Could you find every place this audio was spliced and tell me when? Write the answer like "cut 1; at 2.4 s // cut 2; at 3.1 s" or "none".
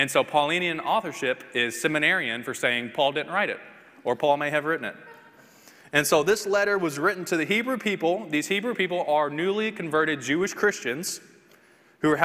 none